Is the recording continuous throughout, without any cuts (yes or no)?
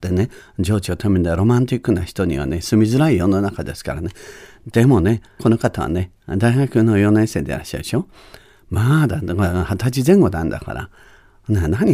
no